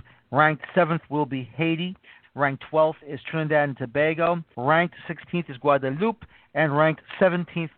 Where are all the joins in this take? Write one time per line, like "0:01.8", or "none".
0:02.2
0:04.5